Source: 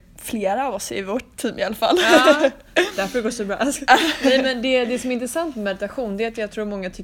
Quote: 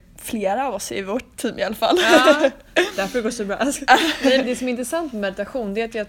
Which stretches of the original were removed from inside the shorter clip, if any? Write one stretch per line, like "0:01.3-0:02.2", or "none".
0:04.4-0:04.9